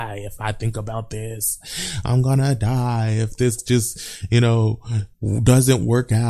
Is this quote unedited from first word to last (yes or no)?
yes